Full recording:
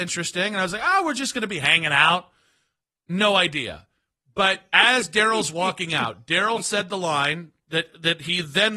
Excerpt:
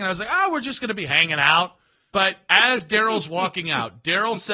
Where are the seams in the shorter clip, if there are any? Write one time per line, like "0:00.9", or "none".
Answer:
0:02.1

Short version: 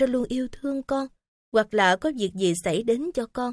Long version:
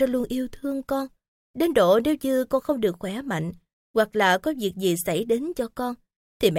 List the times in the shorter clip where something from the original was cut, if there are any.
0:01.4

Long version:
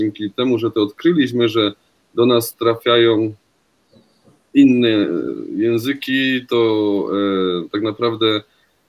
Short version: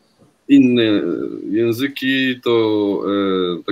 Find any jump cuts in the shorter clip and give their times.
none

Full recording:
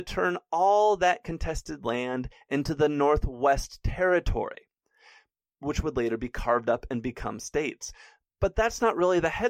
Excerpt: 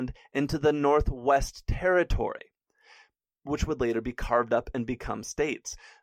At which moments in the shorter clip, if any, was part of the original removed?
none

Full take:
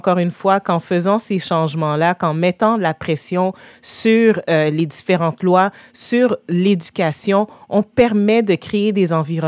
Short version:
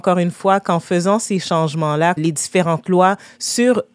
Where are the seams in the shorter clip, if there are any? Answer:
0:02.2

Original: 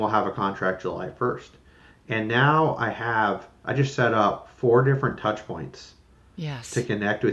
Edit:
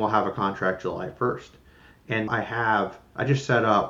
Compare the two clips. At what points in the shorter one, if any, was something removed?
0:02.3

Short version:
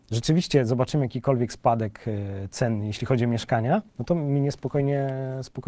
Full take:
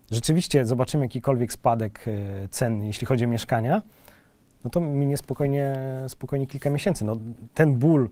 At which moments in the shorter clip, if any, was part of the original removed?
0:03.9

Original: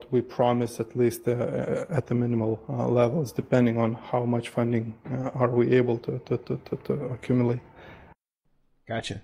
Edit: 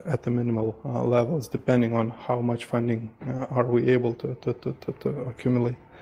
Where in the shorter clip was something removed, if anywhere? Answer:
none

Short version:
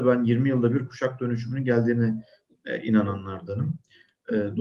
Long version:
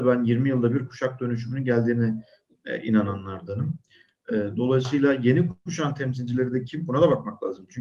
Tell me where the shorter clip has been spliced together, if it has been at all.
none

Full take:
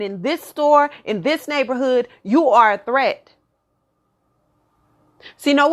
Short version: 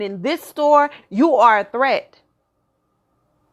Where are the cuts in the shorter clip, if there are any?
0:01.0

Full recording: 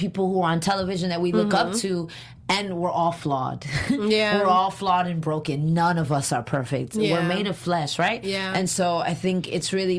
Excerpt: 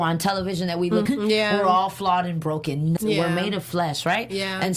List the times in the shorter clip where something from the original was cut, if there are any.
0:01.1
0:03.0

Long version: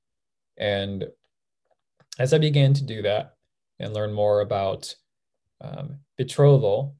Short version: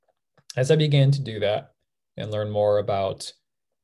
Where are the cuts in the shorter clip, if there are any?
none

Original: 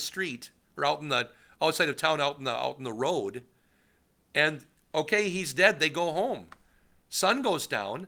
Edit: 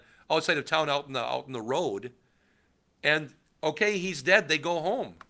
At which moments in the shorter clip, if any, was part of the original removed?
none

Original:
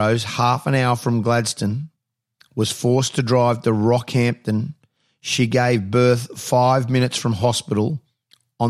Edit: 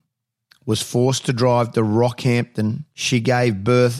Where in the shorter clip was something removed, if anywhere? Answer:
0:02.9

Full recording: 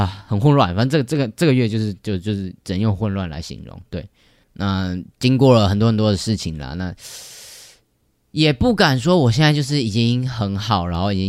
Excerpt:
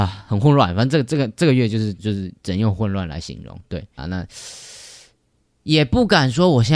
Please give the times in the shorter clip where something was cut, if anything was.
0:02.0
0:04.0

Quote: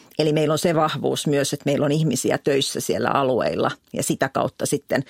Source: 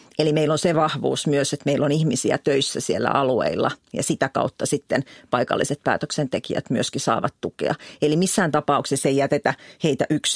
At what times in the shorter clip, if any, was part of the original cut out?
none

